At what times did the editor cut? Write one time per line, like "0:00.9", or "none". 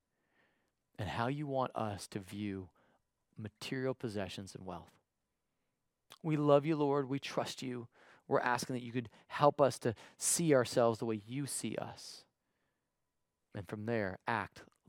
none